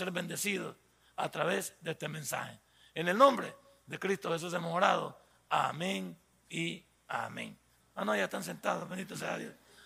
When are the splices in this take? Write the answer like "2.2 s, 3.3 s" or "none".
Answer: 7.8 s